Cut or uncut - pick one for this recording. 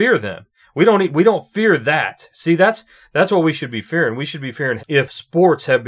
cut